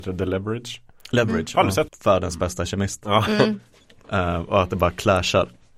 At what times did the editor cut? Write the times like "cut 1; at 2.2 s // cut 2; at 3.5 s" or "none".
cut 1; at 1.9 s